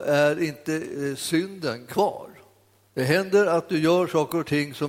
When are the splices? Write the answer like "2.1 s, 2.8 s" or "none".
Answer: 2.9 s